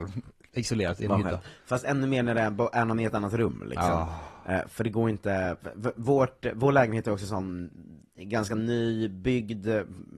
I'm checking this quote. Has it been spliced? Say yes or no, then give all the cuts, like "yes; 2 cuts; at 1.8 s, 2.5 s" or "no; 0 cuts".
no; 0 cuts